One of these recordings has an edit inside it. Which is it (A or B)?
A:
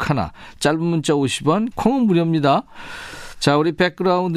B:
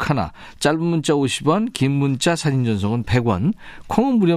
A